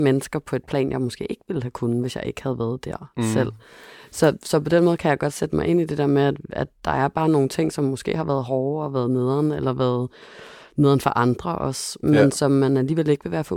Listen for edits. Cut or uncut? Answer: uncut